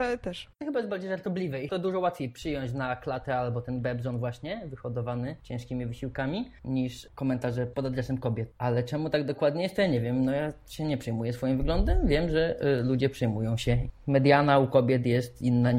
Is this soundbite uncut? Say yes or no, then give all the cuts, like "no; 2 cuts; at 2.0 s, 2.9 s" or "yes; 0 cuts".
yes; 0 cuts